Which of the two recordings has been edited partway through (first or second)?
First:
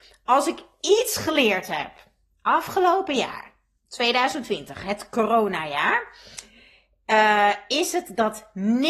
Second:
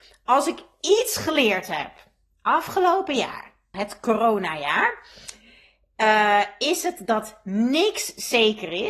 second